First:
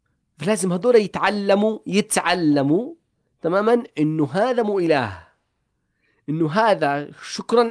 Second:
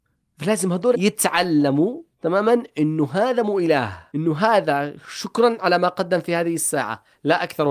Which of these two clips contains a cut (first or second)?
second